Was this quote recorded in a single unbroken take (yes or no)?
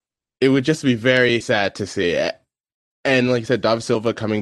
no